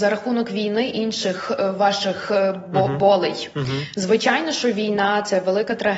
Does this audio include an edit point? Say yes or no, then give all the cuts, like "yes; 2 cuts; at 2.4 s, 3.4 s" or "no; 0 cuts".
no; 0 cuts